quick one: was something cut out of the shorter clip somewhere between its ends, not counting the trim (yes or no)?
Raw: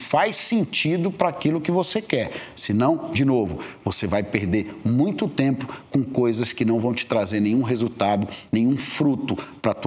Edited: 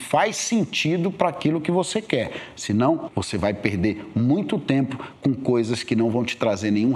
yes